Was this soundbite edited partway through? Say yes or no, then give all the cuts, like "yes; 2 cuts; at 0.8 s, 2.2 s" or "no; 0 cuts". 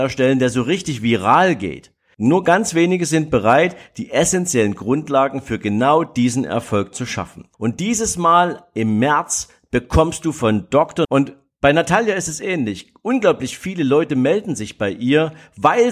yes; 3 cuts; at 2.1 s, 7.5 s, 11.0 s